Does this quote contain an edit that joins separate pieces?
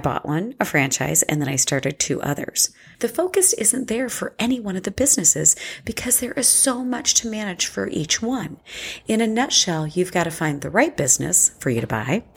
yes; 2 cuts; at 2.9 s, 9.0 s

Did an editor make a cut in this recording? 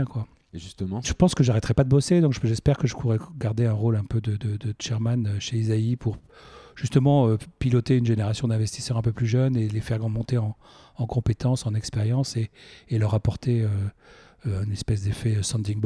yes; 1 cut; at 1.0 s

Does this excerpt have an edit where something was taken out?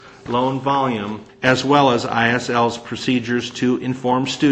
yes; 1 cut; at 1.3 s

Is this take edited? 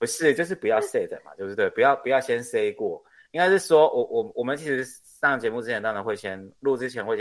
no; 0 cuts

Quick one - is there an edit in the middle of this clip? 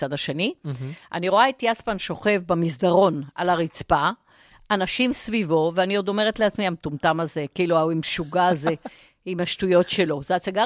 no; 0 cuts

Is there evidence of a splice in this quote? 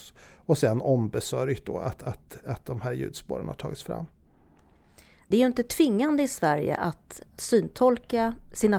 no; 0 cuts

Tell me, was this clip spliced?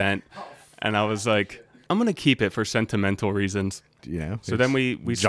yes; 2 cuts; at 1.9 s, 4.0 s

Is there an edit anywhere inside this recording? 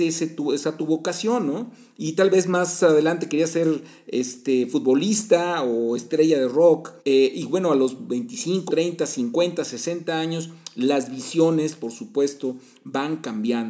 yes; 2 cuts; at 7.0 s, 8.7 s

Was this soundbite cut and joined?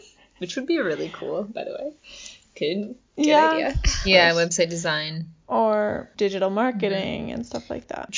yes; 1 cut; at 4.0 s

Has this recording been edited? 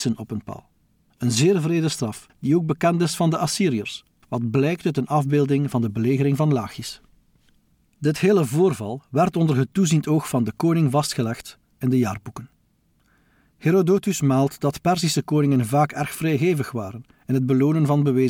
no; 0 cuts

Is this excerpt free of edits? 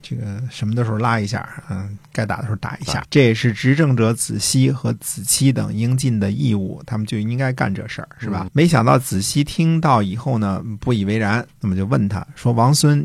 no; 3 cuts; at 3.0 s, 8.5 s, 11.5 s

